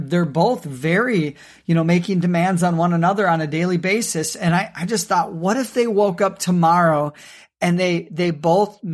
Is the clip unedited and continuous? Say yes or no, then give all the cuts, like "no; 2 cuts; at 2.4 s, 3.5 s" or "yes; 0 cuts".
yes; 0 cuts